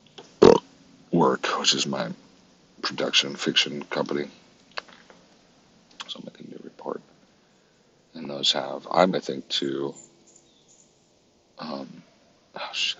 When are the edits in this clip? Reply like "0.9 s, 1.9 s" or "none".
6.1 s, 9.1 s